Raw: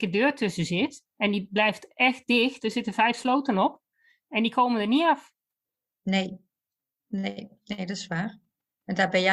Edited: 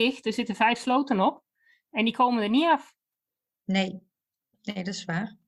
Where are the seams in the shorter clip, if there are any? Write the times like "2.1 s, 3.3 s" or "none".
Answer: 4.5 s